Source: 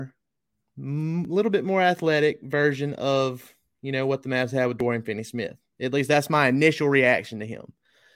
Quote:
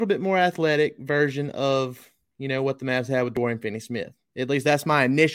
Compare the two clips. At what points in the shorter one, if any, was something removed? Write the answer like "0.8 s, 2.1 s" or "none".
none